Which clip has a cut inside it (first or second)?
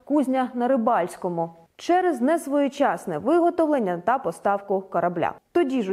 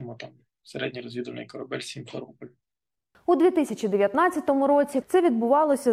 second